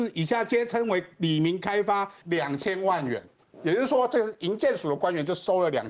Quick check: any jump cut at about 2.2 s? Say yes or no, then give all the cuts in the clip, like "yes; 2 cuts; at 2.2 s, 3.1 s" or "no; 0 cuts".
yes; 1 cut; at 2.2 s